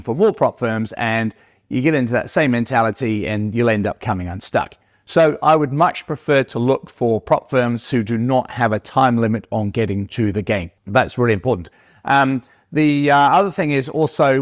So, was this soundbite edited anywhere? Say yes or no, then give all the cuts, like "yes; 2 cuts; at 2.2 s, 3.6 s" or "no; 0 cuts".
yes; 1 cut; at 10.8 s